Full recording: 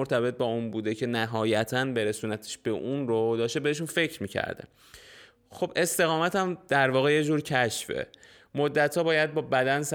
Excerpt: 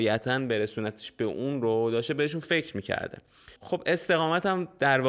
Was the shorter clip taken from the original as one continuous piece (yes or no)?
no